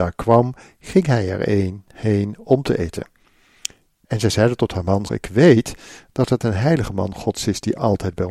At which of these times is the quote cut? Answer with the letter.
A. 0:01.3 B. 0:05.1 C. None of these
B